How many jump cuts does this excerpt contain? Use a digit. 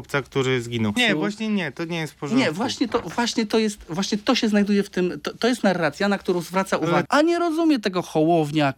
2